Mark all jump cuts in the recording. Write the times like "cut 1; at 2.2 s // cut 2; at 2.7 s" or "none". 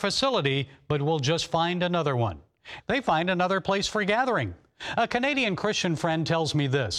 cut 1; at 2.8 s